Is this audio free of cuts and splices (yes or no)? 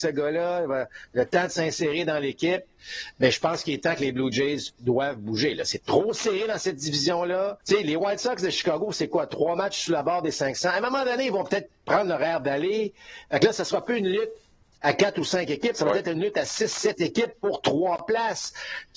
no